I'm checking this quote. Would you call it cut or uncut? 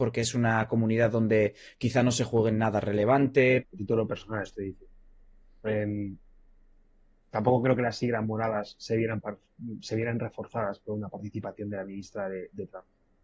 cut